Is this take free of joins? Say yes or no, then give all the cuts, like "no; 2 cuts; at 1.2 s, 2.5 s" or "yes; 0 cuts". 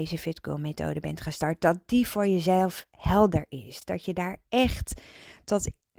yes; 0 cuts